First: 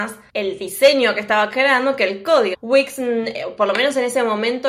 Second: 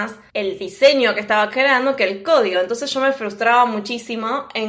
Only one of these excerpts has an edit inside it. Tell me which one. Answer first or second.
first